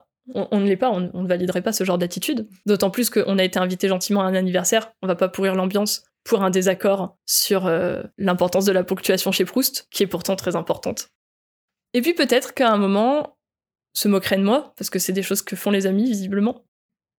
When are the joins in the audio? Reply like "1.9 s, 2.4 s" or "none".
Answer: 11.8 s, 13.7 s